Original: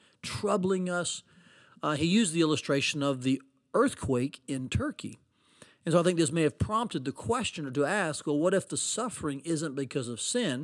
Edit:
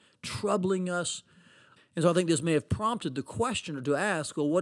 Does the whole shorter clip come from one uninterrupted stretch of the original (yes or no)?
no